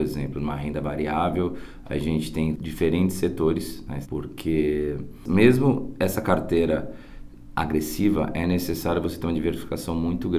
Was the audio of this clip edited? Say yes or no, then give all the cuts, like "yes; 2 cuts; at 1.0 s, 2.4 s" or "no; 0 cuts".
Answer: yes; 1 cut; at 4.0 s